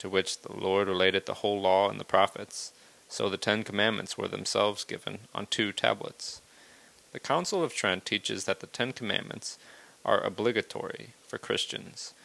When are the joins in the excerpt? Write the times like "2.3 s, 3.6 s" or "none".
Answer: 7.0 s